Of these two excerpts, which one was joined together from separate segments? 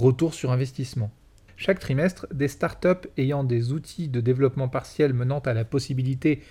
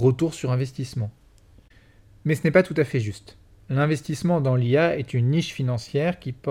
first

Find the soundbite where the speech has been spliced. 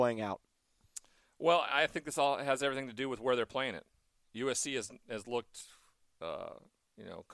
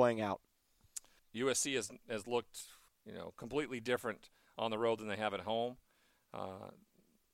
second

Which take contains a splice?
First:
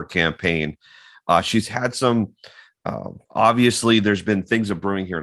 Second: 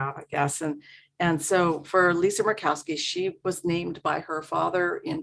first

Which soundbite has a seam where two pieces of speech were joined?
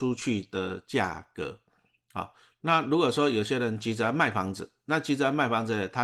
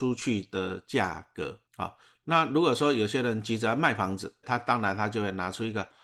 second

